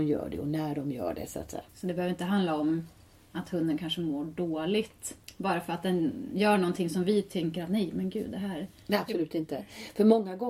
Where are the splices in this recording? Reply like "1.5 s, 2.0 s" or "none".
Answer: 1.7 s